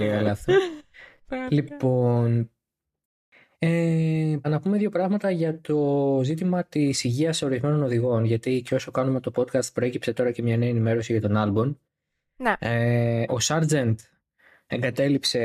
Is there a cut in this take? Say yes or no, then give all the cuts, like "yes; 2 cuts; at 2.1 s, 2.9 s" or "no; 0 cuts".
yes; 2 cuts; at 4.4 s, 13.3 s